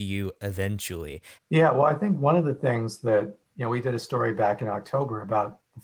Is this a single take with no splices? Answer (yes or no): no